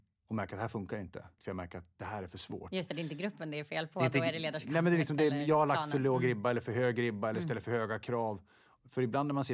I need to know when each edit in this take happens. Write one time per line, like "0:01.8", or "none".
0:01.4